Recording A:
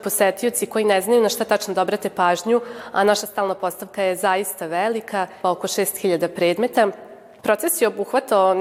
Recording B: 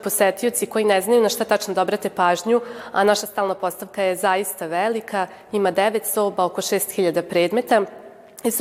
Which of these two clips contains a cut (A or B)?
A